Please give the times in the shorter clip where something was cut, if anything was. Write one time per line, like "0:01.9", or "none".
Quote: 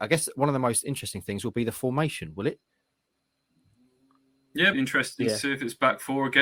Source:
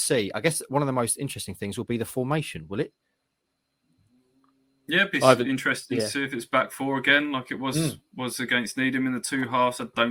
0:04.7